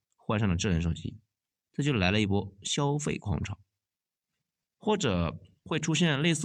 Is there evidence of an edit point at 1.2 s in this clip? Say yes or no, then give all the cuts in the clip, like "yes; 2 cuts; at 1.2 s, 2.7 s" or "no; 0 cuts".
no; 1 cut; at 4.7 s